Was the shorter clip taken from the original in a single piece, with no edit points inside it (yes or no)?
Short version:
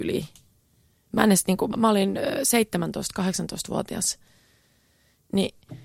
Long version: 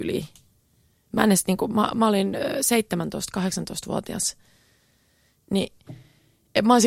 no